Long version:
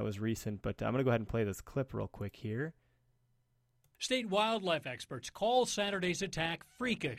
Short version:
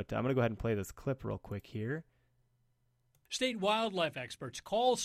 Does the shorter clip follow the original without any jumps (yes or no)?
yes